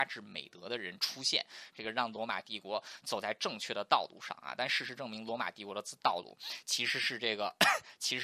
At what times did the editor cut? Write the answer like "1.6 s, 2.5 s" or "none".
1.7 s